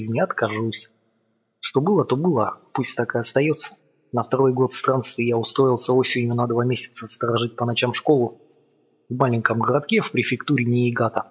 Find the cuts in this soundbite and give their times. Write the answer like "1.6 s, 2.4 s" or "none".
none

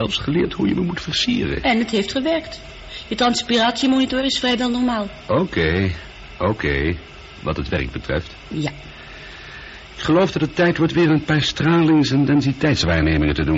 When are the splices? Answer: none

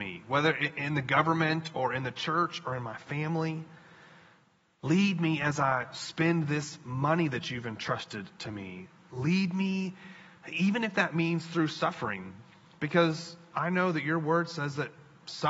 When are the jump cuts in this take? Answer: none

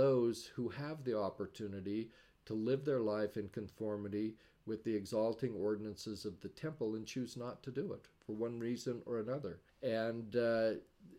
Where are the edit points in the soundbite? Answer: 9.7 s

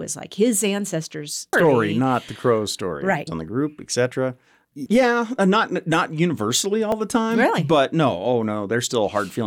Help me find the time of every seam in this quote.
1.5 s, 3.3 s, 4.9 s

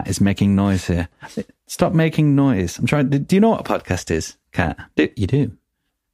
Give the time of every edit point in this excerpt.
none

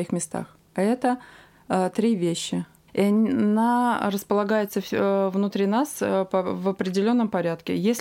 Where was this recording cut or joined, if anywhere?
2.9 s

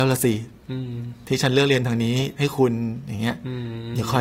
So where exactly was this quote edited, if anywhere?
none

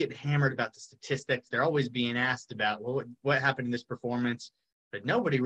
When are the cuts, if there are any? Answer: none

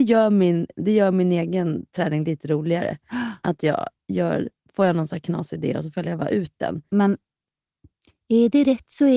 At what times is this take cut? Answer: 6.9 s

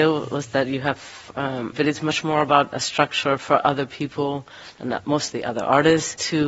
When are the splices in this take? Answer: 1.7 s

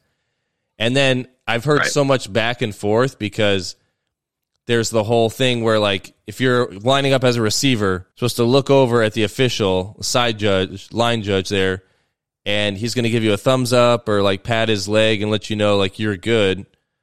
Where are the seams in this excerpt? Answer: 8.1 s

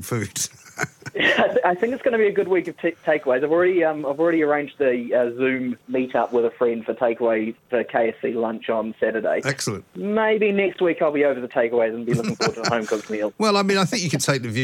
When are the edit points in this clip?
none

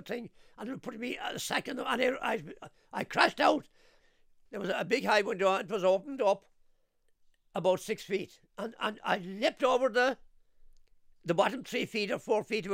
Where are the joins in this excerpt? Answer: 4.5 s

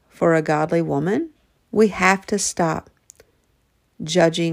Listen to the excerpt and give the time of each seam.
1.6 s

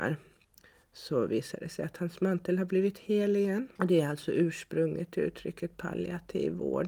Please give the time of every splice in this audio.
3.8 s

